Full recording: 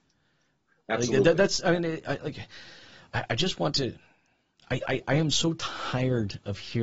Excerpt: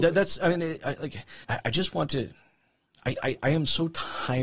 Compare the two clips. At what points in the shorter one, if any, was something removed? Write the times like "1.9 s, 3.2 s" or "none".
1.4 s